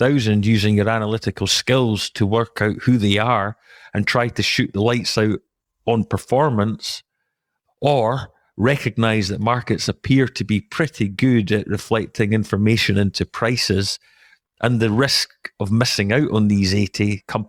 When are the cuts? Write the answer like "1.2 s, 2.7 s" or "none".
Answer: none